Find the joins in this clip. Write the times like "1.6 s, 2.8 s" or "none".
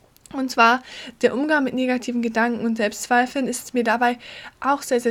none